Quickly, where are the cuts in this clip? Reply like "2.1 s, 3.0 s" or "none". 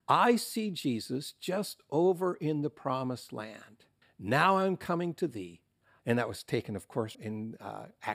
4.0 s, 6.0 s, 7.1 s